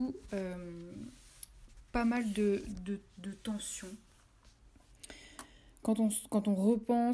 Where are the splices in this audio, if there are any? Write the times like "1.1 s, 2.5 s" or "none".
none